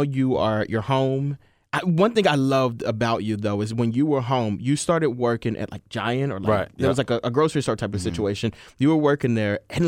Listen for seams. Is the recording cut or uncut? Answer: uncut